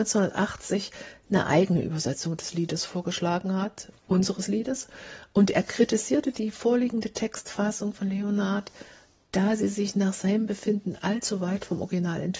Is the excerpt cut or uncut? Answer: uncut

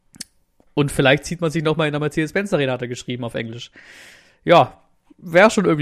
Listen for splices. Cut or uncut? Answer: uncut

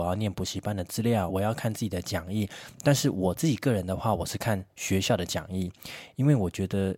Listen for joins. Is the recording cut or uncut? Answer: cut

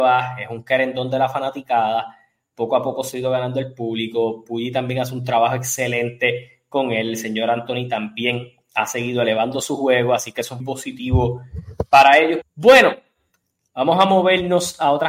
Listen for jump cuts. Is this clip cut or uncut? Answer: cut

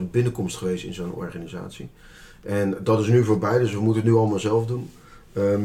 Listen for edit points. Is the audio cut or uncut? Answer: uncut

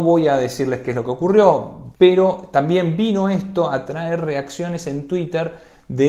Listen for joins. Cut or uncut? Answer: cut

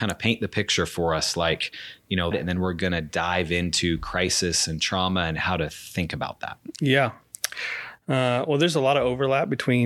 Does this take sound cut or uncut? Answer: cut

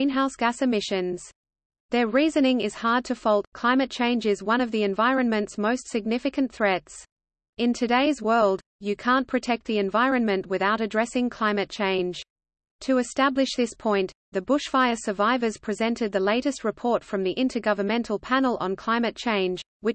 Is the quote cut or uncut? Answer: uncut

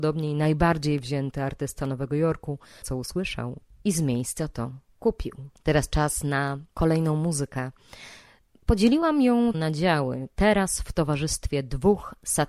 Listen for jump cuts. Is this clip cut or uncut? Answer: cut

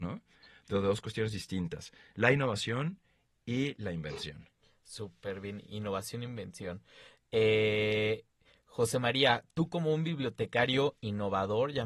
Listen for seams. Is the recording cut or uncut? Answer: uncut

